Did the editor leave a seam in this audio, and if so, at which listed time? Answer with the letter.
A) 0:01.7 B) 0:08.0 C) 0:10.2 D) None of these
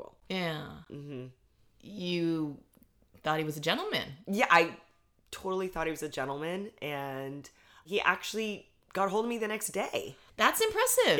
D